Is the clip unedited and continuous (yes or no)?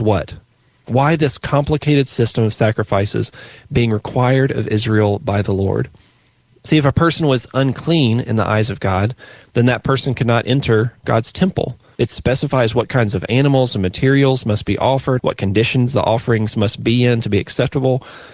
no